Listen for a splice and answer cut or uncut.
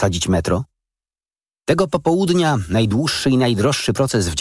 uncut